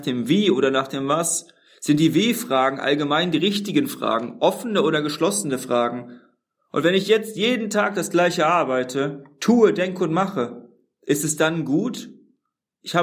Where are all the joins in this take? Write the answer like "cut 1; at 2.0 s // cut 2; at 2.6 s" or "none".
none

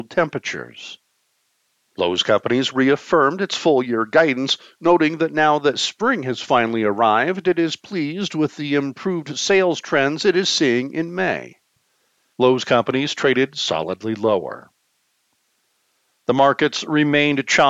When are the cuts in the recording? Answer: none

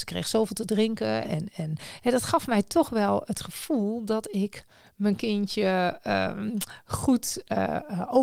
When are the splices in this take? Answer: cut 1; at 1.2 s

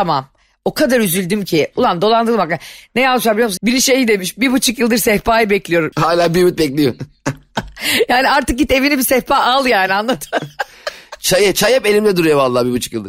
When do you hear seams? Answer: cut 1; at 3.6 s // cut 2; at 5.9 s

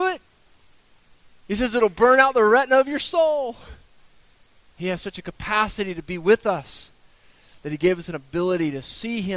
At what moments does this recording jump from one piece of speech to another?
cut 1; at 4.8 s

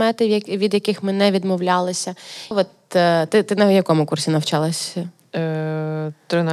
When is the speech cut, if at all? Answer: cut 1; at 2.5 s

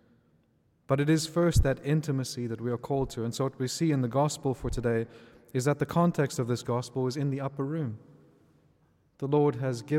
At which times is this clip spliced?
none

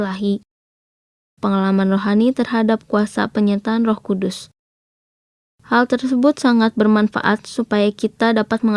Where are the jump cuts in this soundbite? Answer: cut 1; at 1.4 s

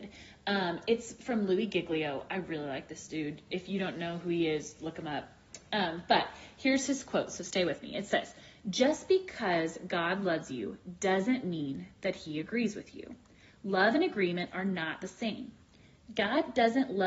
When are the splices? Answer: none

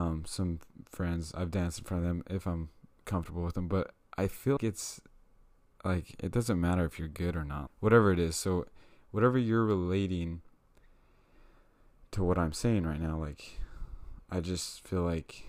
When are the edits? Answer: cut 1; at 4.6 s // cut 2; at 7.7 s

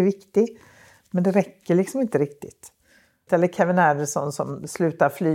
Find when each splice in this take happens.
cut 1; at 3.3 s

